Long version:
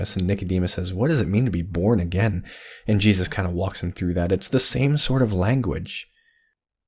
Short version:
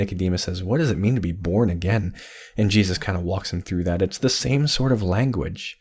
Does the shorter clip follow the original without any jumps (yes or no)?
yes